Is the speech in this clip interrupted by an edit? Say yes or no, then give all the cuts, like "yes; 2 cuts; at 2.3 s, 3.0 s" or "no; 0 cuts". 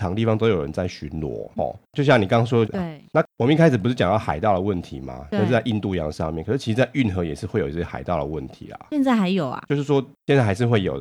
yes; 2 cuts; at 1.6 s, 2.7 s